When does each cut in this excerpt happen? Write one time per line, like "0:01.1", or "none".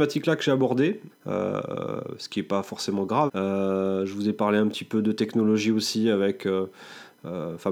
0:01.1
0:03.3